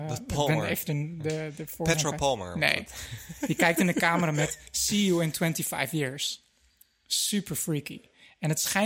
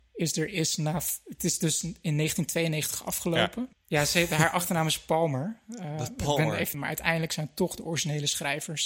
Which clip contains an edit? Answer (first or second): second